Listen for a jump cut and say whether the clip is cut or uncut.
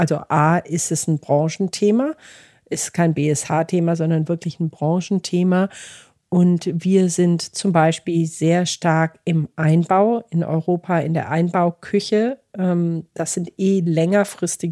uncut